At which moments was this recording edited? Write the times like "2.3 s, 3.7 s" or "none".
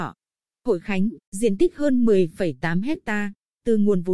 1.2 s